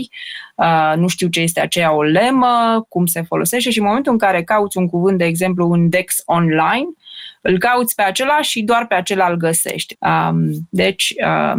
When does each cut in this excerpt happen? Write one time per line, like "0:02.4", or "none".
0:09.9